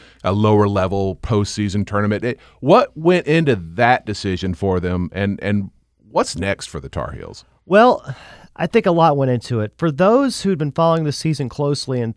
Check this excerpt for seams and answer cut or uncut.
uncut